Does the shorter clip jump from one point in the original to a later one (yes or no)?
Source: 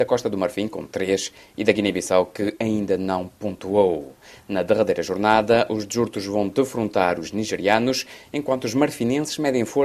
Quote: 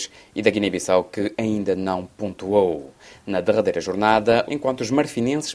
yes